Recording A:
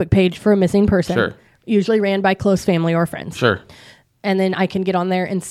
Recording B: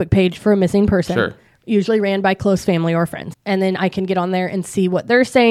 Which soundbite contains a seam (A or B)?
B